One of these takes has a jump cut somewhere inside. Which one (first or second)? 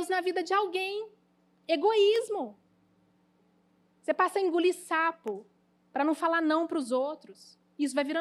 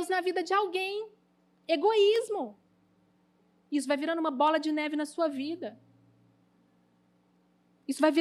second